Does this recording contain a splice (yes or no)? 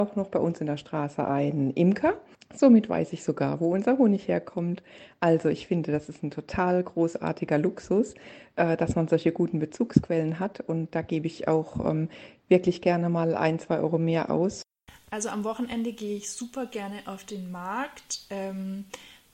no